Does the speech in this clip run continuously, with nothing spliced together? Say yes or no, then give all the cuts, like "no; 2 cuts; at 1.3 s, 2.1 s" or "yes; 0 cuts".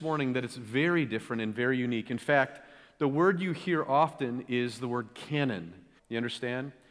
no; 1 cut; at 6.0 s